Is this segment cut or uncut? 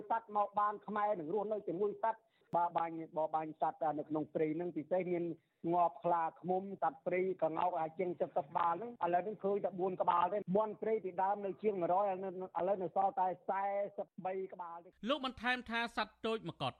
cut